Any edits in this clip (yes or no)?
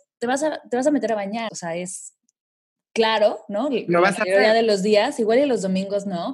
yes